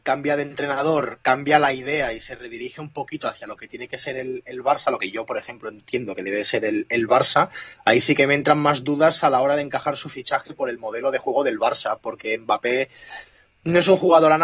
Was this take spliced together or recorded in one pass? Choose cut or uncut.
uncut